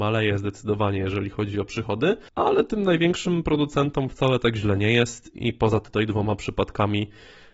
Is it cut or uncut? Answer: cut